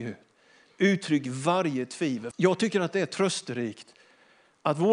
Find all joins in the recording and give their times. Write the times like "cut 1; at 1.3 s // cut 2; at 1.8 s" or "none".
cut 1; at 2.3 s